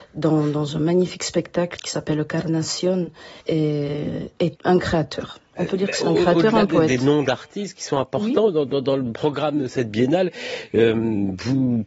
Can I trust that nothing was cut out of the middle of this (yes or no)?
no